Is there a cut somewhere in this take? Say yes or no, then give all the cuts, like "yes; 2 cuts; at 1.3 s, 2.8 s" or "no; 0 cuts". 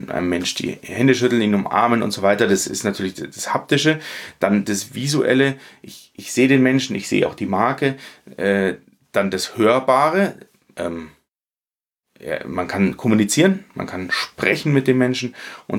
no; 0 cuts